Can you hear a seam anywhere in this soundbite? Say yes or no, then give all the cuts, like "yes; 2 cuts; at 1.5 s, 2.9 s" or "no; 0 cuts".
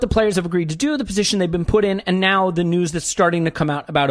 no; 0 cuts